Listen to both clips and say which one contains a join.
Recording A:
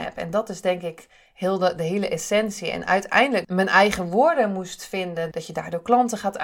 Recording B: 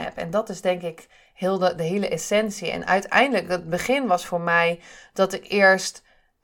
A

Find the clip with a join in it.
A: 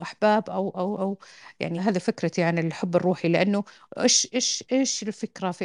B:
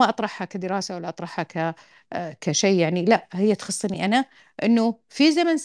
A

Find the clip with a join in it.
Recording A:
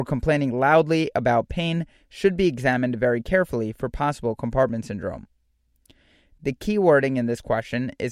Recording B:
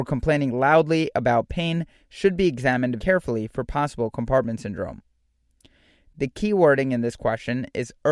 B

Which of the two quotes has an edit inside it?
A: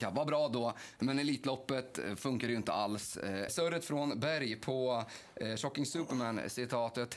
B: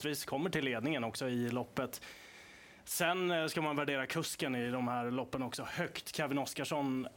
A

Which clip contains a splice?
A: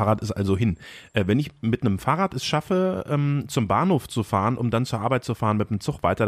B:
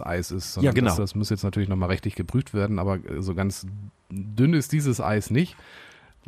B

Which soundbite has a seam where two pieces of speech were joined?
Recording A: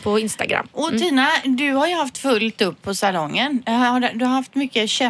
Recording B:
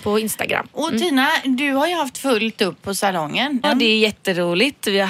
B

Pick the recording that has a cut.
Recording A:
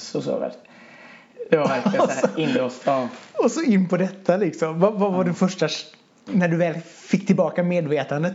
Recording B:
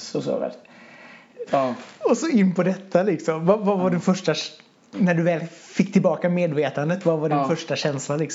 B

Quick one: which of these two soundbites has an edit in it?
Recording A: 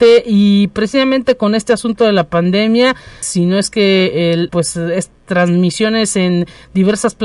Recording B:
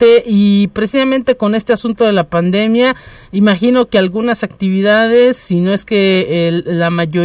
A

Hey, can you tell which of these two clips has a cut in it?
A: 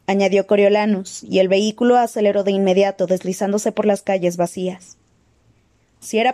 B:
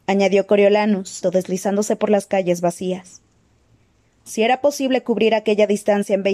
B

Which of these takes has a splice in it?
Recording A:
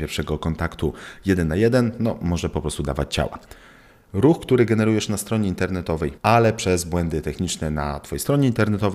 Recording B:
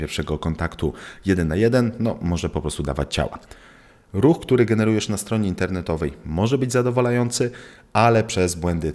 A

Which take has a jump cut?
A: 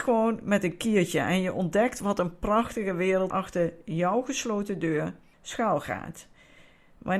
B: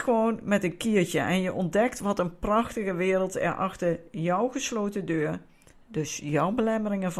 A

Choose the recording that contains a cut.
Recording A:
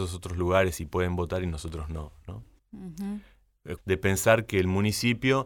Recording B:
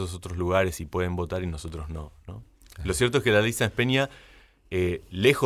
A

